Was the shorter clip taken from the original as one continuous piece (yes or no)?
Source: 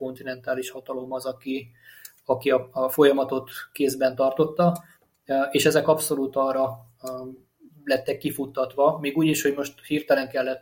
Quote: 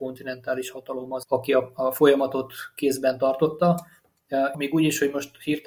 no